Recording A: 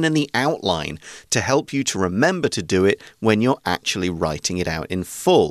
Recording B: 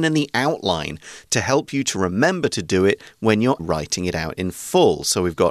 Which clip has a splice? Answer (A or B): B